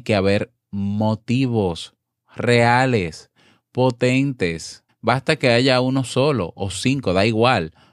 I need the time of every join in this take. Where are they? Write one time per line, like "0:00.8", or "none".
0:04.9